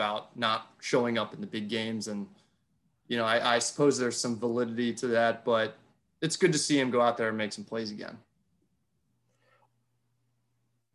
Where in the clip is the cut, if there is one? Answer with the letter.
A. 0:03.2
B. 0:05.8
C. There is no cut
C